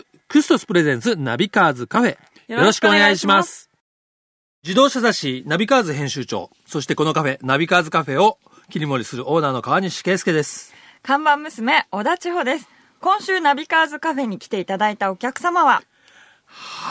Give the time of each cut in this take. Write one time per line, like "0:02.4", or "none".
0:02.4